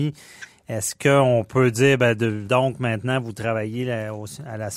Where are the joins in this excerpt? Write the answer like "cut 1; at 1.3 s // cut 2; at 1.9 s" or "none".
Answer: cut 1; at 2.5 s

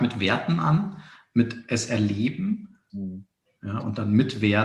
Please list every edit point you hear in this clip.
cut 1; at 2.9 s

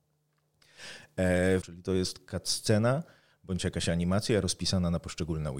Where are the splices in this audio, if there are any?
cut 1; at 1.6 s

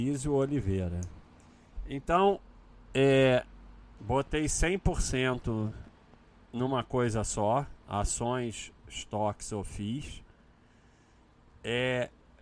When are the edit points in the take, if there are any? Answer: cut 1; at 4.0 s

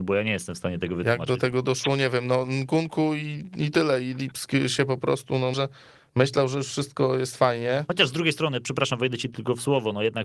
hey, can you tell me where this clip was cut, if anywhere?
cut 1; at 5.5 s

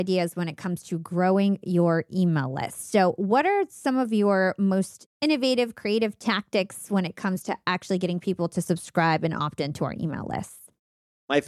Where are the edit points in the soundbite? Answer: none

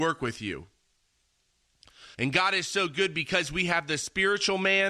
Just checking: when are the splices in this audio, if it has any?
cut 1; at 2.1 s

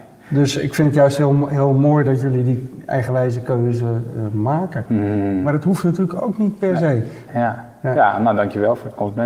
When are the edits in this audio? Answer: cut 1; at 4.9 s // cut 2; at 7.3 s

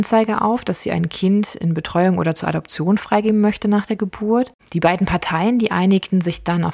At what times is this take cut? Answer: cut 1; at 4.6 s

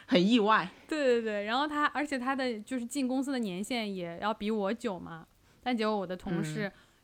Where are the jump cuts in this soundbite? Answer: none

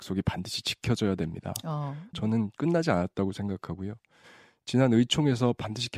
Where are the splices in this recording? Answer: cut 1; at 2.1 s

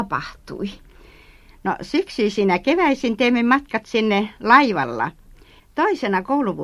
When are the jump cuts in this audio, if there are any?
cut 1; at 5.6 s

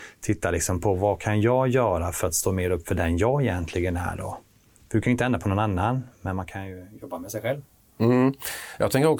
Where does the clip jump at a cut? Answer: none

